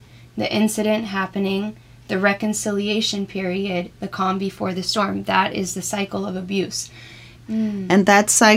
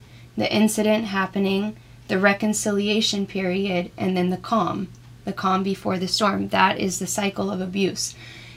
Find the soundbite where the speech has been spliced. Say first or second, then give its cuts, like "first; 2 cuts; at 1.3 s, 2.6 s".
first; 2 cuts; at 3.9 s, 7.4 s